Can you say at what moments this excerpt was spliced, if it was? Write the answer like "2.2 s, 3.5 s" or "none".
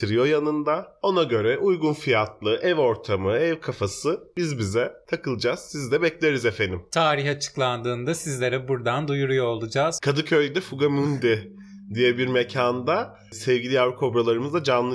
10.0 s